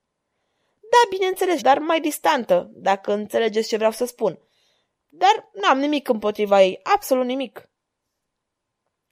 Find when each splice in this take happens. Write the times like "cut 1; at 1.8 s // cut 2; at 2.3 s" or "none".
cut 1; at 1.6 s // cut 2; at 5.0 s